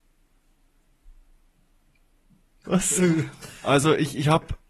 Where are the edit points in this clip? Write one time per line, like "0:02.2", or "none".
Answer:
0:02.6